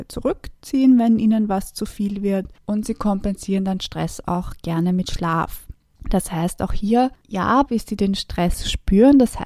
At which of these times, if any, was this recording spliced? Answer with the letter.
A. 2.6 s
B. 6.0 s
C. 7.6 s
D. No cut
C